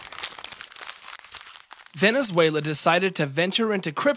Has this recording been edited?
no; 0 cuts

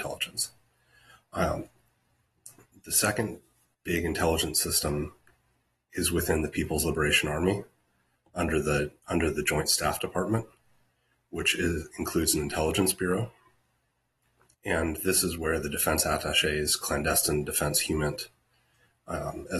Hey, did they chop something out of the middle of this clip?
no; 0 cuts

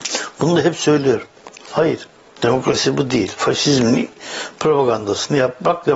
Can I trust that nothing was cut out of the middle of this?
no; 1 cut; at 1.6 s

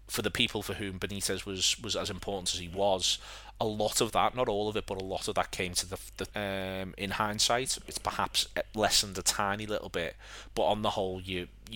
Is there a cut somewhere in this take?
yes; 1 cut; at 6.3 s

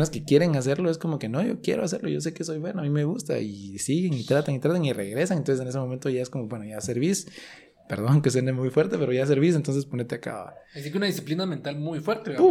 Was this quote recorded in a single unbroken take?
yes; 0 cuts

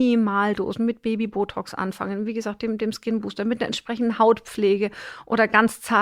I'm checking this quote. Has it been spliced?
no; 0 cuts

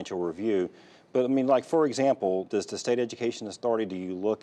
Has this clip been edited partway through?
yes; 1 cut; at 2.5 s

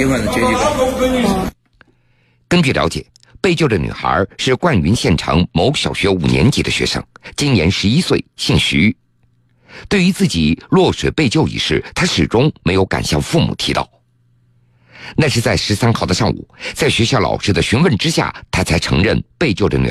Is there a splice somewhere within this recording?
no; 0 cuts

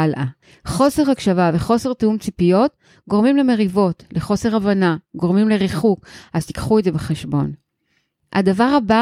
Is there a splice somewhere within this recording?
no; 0 cuts

